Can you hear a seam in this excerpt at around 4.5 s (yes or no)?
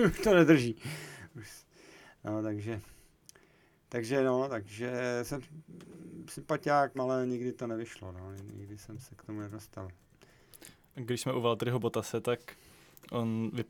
no